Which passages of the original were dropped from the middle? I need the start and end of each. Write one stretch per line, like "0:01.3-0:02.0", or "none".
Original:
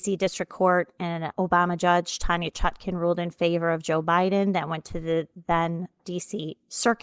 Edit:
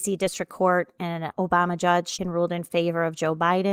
0:02.2-0:02.9